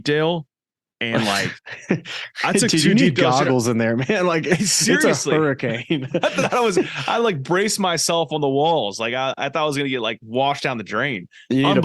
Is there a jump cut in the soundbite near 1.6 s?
yes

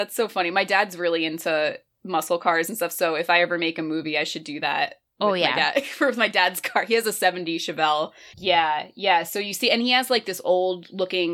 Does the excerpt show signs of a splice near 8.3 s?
yes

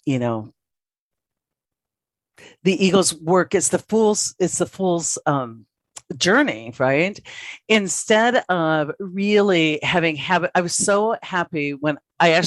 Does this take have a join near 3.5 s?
no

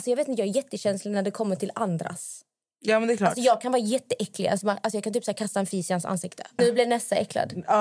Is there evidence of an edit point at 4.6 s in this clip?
yes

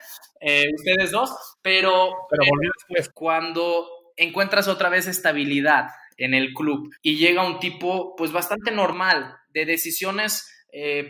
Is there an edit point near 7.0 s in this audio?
yes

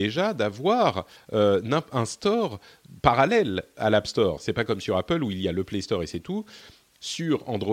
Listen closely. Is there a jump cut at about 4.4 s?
yes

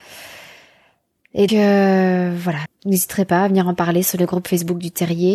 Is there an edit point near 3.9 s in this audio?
no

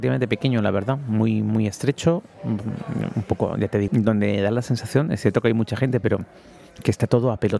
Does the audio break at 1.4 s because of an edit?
no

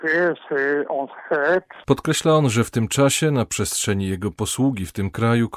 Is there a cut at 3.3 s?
no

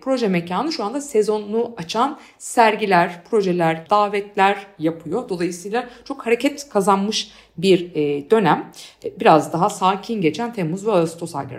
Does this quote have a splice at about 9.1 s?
no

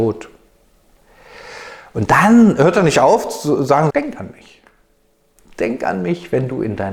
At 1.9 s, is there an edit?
no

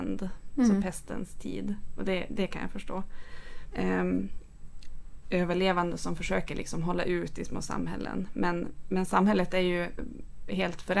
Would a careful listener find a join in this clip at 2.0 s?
no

